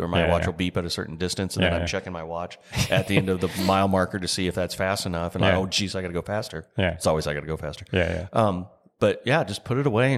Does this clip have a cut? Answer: no; 0 cuts

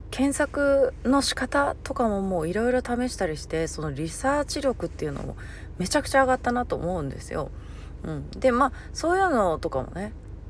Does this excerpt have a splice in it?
no; 0 cuts

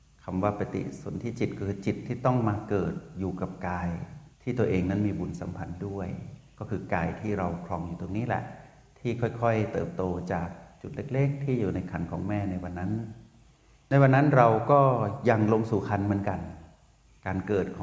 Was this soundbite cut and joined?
yes; 1 cut; at 4.3 s

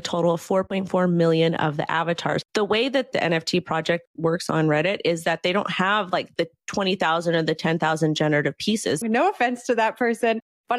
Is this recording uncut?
no; 2 cuts; at 2.5 s, 9.0 s

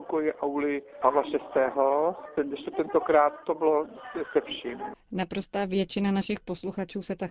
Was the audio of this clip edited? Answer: yes; 1 cut; at 4.9 s

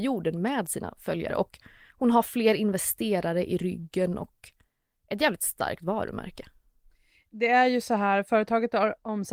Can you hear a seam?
no; 0 cuts

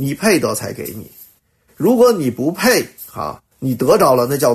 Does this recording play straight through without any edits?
no; 1 cut; at 3.5 s

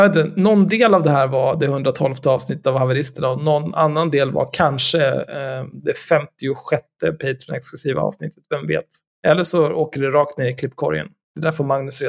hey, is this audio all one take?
yes; 0 cuts

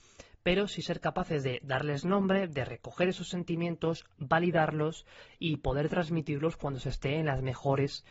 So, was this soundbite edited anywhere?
no; 0 cuts

